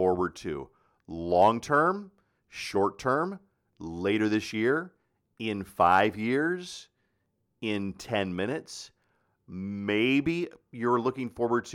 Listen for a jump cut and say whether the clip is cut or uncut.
uncut